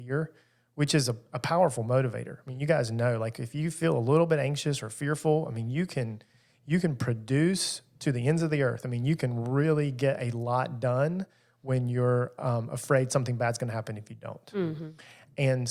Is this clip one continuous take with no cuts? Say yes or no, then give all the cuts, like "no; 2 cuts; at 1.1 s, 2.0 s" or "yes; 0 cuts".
yes; 0 cuts